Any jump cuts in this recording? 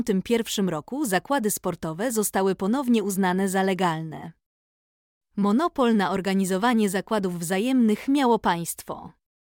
no; 0 cuts

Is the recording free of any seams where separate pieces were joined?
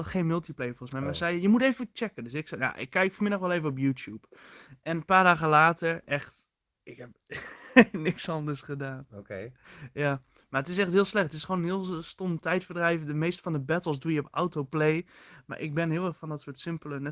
yes; 0 cuts

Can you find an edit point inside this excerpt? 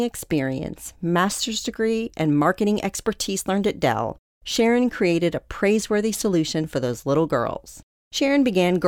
no; 0 cuts

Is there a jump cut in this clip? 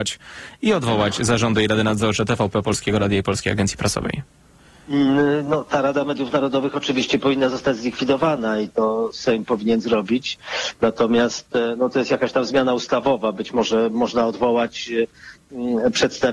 no; 0 cuts

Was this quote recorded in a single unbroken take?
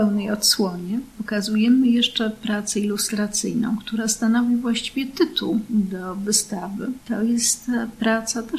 yes; 0 cuts

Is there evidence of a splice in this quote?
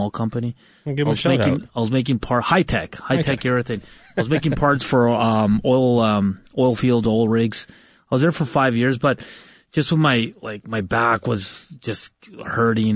no; 0 cuts

